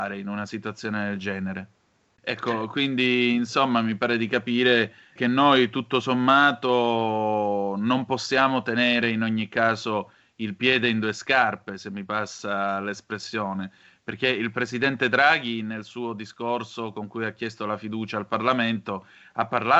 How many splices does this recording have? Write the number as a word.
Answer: two